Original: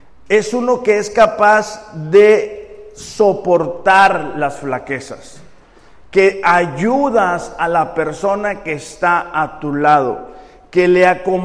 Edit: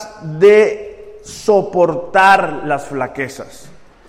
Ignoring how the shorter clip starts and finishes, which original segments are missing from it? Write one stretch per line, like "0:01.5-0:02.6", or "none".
none